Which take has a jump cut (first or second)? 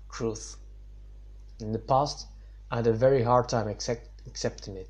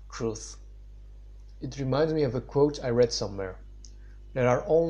first